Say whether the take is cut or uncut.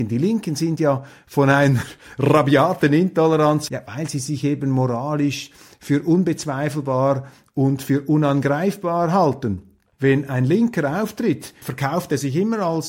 cut